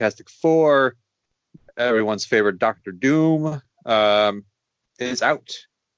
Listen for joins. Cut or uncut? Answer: uncut